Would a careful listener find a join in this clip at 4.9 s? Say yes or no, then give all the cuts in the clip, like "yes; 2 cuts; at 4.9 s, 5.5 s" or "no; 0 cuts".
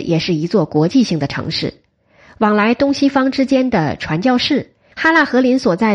yes; 1 cut; at 4.9 s